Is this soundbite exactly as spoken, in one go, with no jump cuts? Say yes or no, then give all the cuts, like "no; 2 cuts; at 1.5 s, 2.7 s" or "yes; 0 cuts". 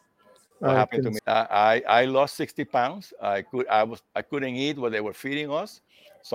no; 1 cut; at 1.2 s